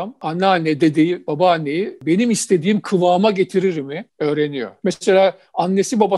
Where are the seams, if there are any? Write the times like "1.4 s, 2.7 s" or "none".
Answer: none

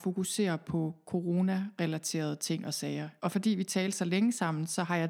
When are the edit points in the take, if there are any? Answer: 3.2 s

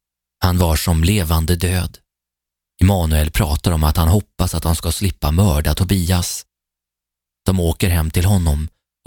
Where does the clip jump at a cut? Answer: 2.7 s

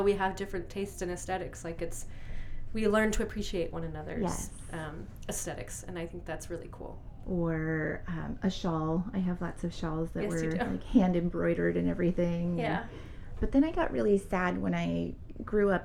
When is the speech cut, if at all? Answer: 7.2 s, 13.3 s

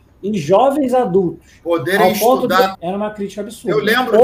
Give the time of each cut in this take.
2.7 s

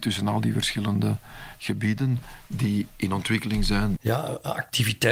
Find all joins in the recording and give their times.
4.0 s

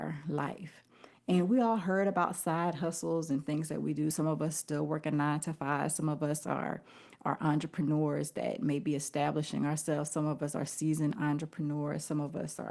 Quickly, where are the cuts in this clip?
none

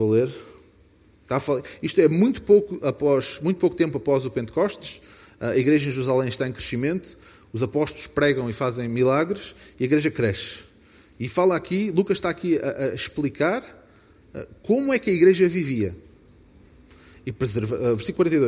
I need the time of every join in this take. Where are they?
none

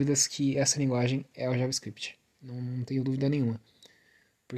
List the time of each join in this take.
none

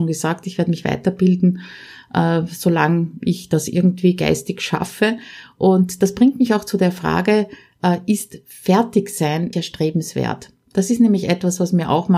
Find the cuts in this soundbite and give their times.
9.5 s

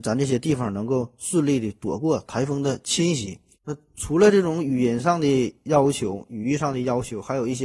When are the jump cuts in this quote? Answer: 3.5 s

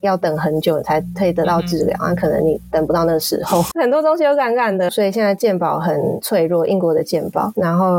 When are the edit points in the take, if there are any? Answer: 3.7 s, 4.9 s

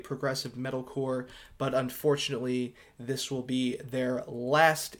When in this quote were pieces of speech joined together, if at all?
none

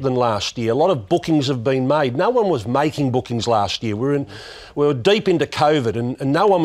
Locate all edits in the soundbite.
none

